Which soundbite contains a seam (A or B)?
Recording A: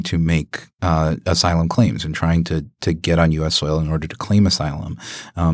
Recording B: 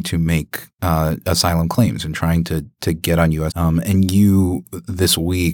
B